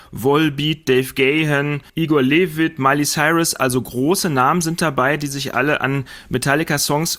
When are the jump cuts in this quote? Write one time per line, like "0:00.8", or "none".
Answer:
0:01.9